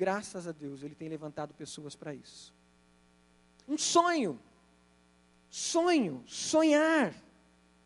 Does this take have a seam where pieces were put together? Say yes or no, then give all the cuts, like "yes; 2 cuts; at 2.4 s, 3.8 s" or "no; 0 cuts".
yes; 1 cut; at 3.6 s